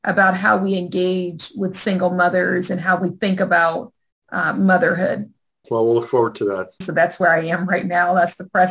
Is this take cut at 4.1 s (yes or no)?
no